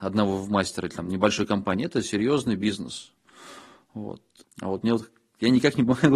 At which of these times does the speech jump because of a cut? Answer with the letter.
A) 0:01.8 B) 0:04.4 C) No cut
B